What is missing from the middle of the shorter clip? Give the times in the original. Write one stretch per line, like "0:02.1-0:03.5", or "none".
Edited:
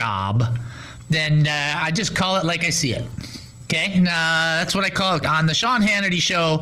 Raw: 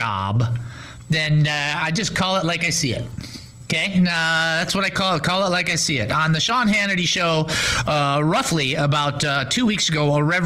0:05.2-0:06.1